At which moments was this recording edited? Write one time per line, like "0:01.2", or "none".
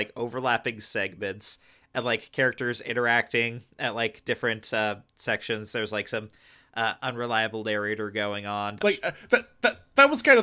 0:08.8